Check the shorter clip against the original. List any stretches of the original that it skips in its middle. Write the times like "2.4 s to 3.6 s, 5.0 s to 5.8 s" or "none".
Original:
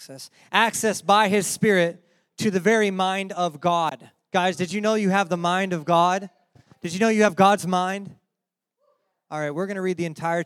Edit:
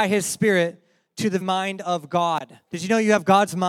2.6 s to 2.9 s, 4.2 s to 6.8 s